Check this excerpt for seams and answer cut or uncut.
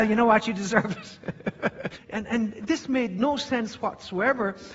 cut